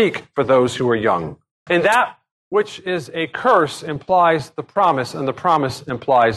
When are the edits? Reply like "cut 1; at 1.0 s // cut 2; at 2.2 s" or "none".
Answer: cut 1; at 1.7 s